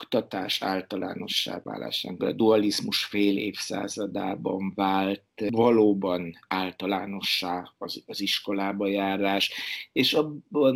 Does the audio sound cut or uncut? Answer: cut